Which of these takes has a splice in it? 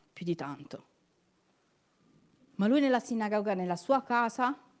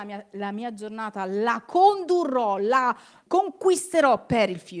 second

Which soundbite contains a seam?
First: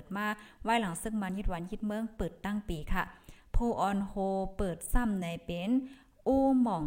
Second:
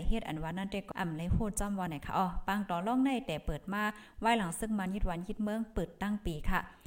second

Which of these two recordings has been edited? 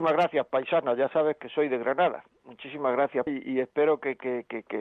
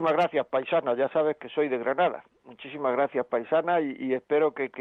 first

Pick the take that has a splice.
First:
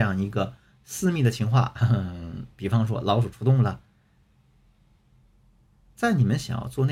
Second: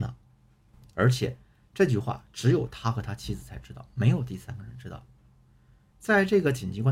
second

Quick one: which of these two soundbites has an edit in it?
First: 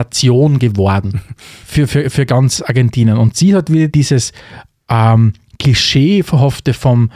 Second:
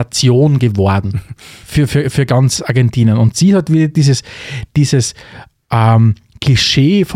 first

